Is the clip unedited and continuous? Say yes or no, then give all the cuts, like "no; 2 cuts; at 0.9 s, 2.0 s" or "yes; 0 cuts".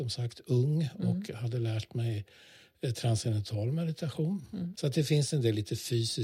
no; 1 cut; at 4.7 s